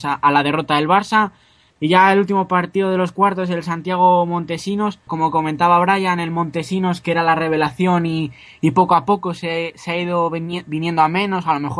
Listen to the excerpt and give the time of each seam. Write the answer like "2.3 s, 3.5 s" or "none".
1.7 s, 5.1 s